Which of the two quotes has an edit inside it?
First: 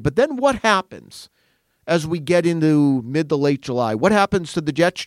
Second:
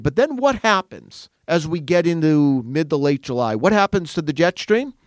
second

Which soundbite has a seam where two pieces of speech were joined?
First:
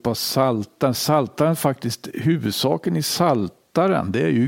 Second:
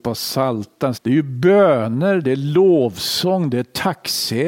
second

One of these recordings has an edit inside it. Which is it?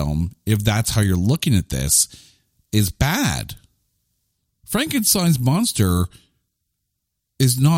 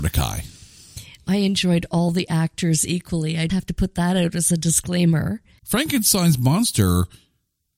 second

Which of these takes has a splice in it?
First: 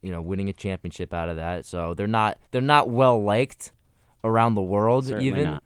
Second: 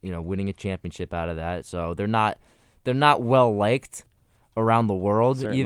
first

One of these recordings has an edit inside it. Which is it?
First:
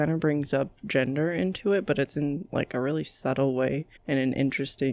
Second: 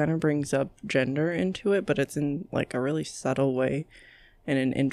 first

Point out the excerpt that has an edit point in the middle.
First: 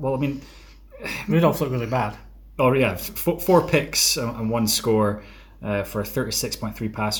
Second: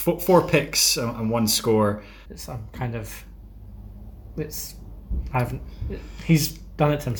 second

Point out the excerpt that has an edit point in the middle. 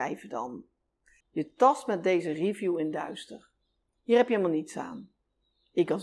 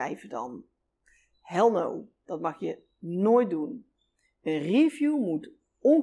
first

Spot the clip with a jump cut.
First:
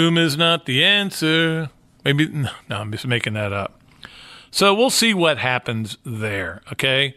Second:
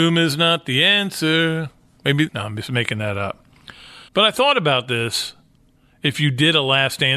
second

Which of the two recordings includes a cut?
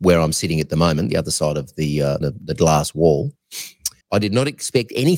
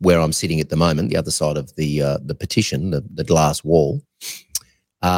first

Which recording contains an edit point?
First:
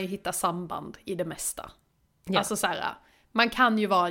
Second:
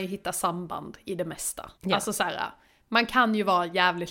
second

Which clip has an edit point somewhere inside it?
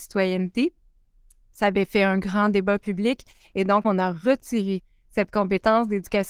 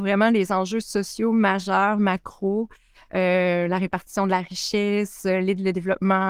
first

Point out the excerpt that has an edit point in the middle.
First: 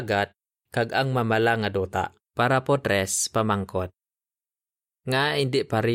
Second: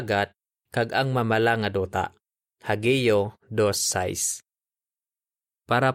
first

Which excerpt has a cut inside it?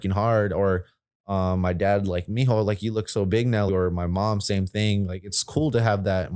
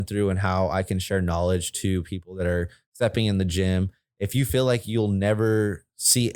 first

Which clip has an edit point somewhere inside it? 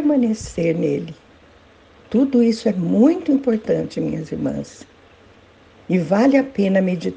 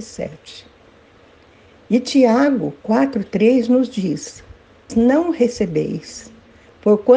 second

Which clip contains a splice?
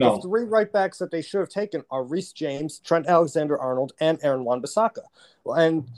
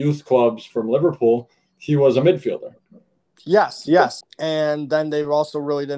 second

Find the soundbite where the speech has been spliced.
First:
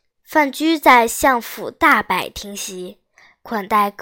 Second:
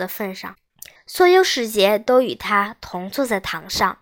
second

